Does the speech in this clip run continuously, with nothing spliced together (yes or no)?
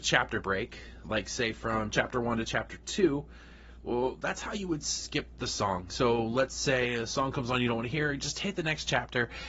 yes